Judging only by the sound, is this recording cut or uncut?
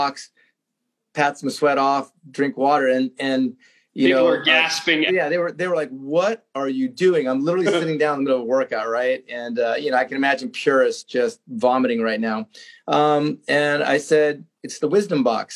cut